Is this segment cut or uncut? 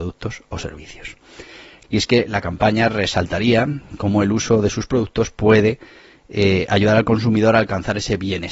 cut